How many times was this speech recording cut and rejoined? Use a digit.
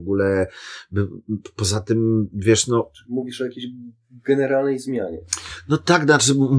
0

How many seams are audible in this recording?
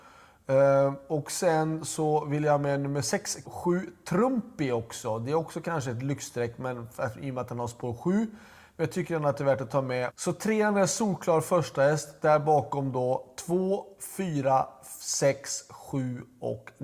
2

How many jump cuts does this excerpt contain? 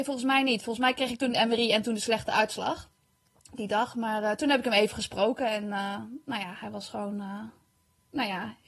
0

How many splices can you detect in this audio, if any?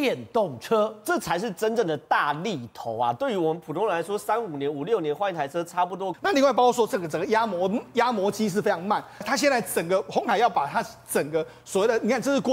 2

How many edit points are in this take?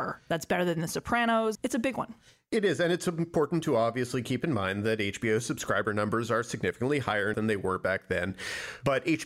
2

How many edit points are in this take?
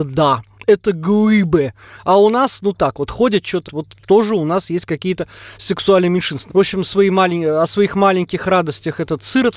2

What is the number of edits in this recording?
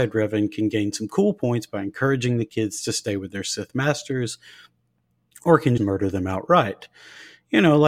1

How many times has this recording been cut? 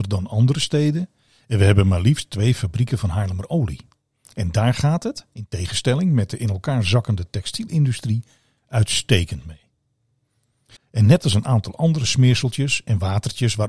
1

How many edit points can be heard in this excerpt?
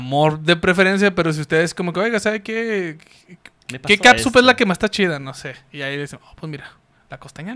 0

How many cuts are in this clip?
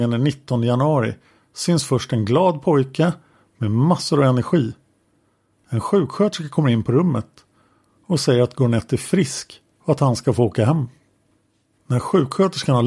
0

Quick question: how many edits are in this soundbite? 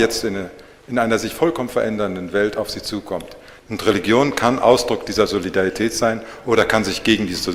1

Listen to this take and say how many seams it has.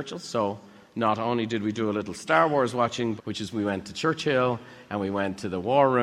1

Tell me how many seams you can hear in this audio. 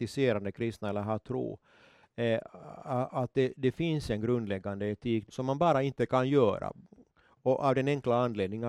1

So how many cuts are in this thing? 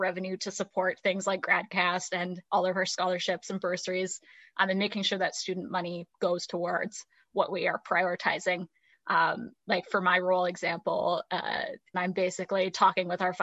2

